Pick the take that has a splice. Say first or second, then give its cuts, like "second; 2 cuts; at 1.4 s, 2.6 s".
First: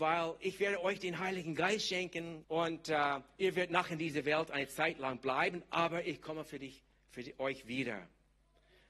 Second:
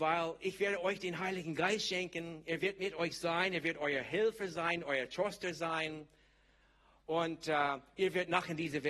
first; 1 cut; at 2.4 s